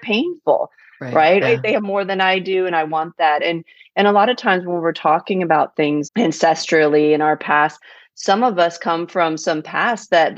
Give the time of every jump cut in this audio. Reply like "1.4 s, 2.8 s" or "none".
1.4 s, 6.0 s